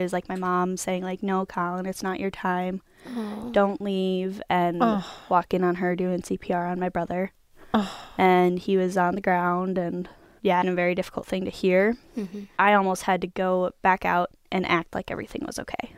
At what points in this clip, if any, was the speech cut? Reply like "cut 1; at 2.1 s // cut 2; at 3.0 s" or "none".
cut 1; at 10.6 s